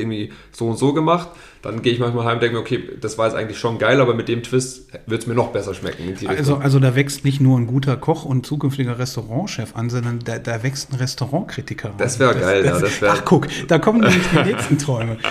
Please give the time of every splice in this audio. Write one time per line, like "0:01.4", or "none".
none